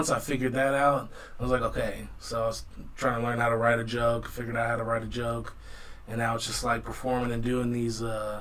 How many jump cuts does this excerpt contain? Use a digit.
0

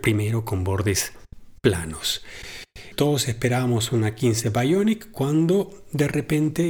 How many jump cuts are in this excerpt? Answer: 1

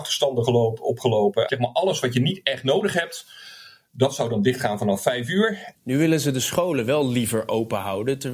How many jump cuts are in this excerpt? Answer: 2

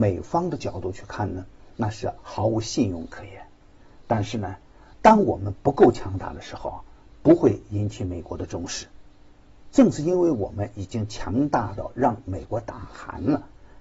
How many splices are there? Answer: 1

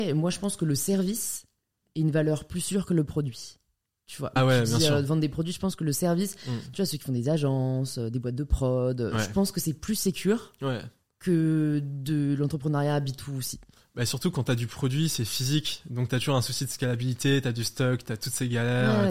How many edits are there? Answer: 1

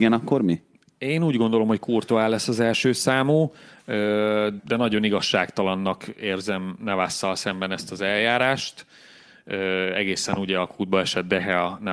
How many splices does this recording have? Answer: 1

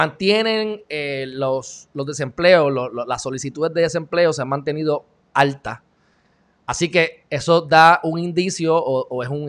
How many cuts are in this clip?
0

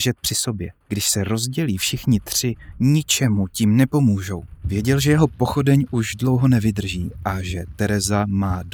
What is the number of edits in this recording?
1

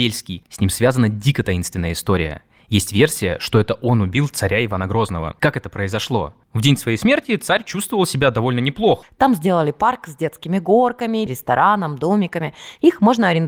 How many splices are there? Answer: 2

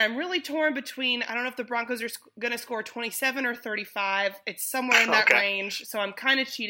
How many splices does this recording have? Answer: 0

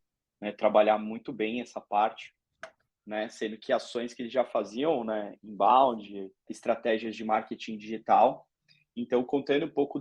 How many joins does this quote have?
2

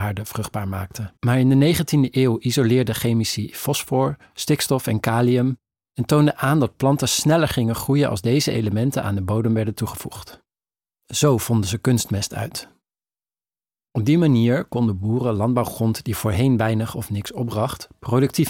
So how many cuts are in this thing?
1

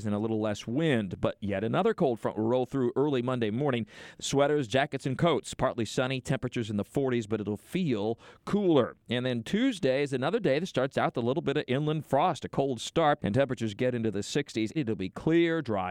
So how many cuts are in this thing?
3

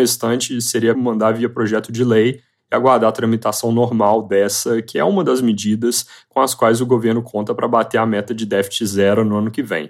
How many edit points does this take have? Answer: 1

